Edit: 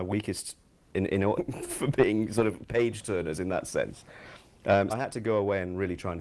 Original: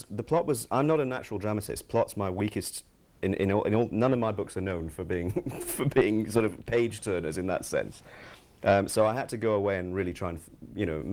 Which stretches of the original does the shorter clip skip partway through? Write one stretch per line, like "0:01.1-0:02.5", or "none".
0:03.6-0:05.3
0:08.9-0:09.1